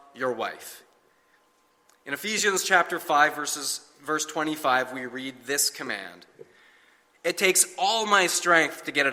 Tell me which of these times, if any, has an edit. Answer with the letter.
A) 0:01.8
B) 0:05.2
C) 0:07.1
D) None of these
C